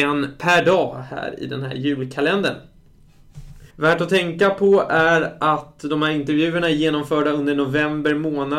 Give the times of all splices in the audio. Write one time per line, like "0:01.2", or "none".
0:03.7